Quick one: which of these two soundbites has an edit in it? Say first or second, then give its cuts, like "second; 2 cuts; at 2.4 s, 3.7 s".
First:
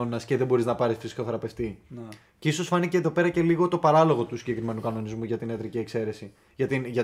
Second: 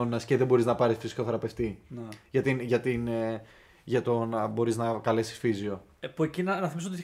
second; 1 cut; at 2.2 s